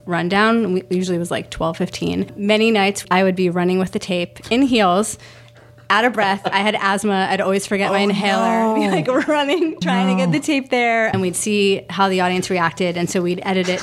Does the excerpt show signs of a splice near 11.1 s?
yes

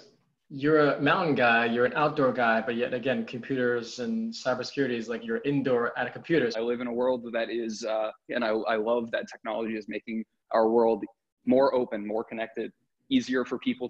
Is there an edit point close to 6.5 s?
yes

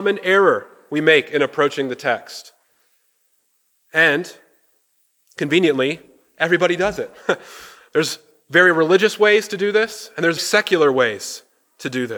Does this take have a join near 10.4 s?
yes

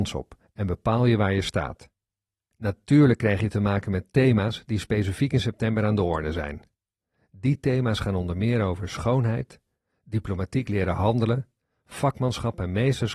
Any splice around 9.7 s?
no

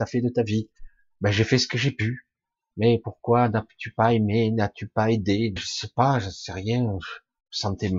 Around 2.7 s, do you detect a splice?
no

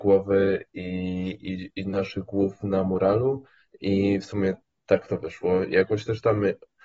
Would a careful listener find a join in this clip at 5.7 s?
no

